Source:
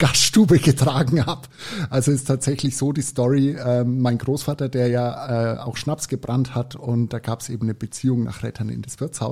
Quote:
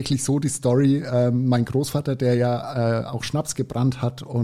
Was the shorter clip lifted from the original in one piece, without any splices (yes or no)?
yes